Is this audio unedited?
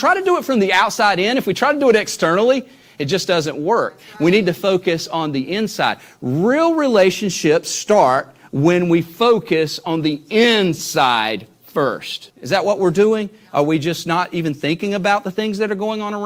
no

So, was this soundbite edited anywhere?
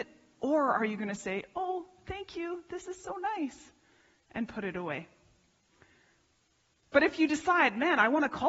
no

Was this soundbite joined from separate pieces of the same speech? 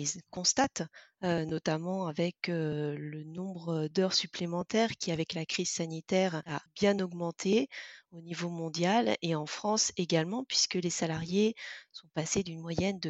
no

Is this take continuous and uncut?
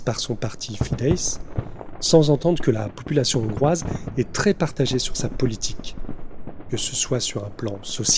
yes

